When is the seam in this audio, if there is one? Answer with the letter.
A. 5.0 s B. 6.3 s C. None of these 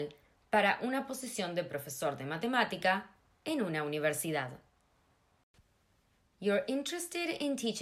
C